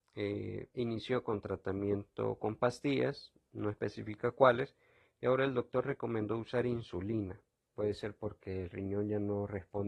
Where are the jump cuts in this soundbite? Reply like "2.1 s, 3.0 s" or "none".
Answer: 7.7 s

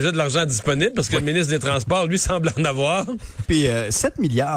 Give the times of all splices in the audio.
3.4 s

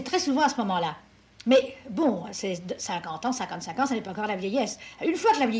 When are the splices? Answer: none

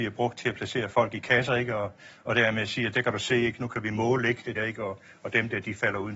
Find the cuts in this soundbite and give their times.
4.6 s

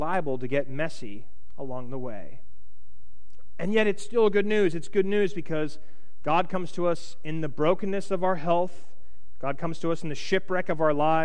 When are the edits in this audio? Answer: none

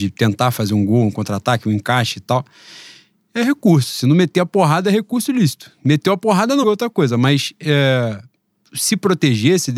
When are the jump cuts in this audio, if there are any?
6.6 s

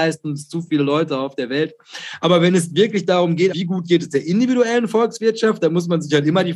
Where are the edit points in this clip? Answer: 3.5 s

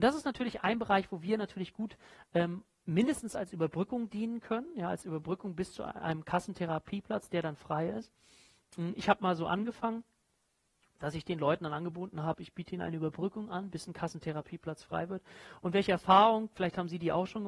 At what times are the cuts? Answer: none

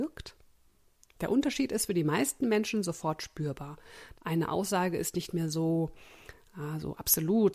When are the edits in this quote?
4.1 s

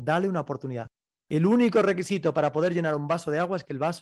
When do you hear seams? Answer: none

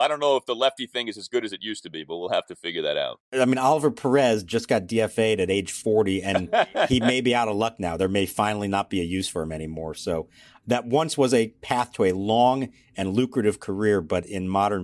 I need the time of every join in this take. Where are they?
3.2 s

